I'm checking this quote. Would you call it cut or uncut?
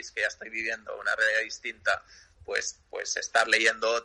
uncut